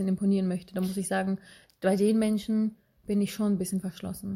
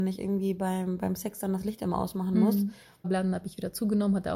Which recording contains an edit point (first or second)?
second